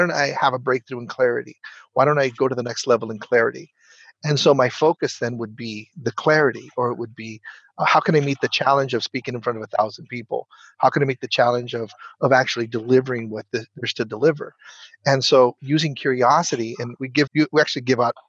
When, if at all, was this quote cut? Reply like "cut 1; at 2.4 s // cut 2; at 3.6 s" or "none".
cut 1; at 17.3 s